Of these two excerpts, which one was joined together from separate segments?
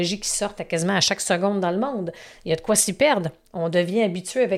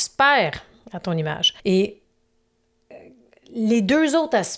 second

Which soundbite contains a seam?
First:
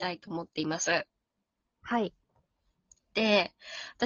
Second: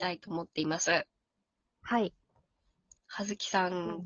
second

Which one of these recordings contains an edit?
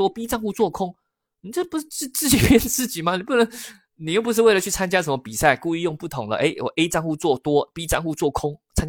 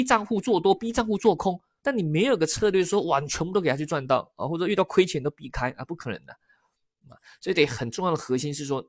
second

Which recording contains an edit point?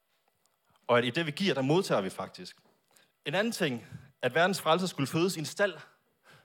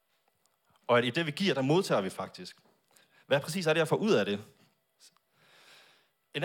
first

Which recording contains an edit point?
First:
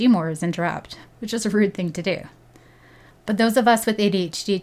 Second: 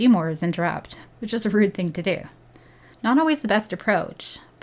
second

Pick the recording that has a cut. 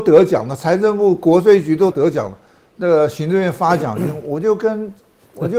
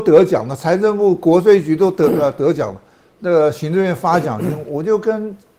first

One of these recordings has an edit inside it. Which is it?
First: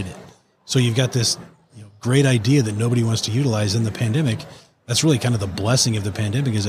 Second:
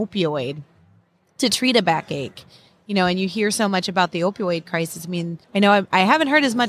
second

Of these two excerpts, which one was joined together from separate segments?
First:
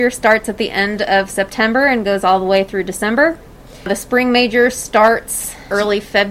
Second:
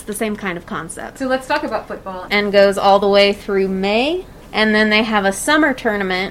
second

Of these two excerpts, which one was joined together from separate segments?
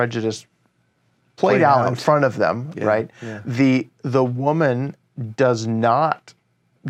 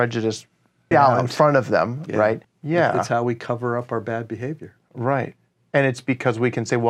second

